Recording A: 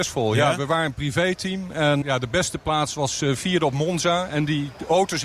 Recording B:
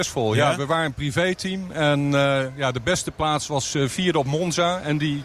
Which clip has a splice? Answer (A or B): A